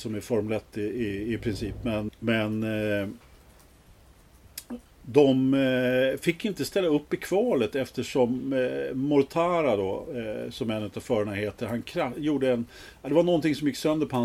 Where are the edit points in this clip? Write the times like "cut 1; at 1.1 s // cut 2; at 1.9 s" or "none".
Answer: cut 1; at 2.1 s // cut 2; at 4.9 s